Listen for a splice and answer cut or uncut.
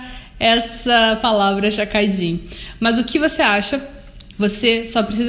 cut